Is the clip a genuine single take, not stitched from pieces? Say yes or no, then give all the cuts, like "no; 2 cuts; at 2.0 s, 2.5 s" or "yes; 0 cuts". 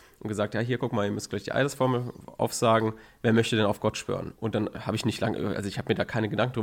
no; 1 cut; at 4.3 s